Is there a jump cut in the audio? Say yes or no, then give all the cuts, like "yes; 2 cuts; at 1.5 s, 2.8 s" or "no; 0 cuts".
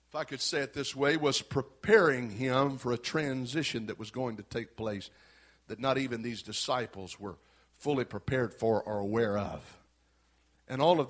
no; 0 cuts